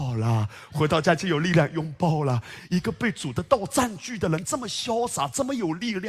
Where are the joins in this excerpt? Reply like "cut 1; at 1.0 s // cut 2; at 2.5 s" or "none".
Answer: cut 1; at 2.6 s // cut 2; at 4.4 s